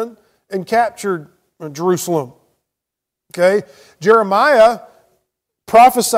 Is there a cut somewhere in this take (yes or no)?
no